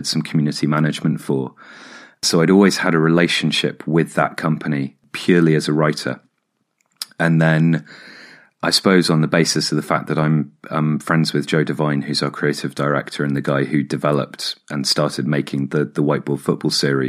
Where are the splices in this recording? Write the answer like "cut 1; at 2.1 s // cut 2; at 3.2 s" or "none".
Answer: none